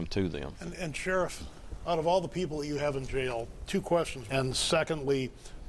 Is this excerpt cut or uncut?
cut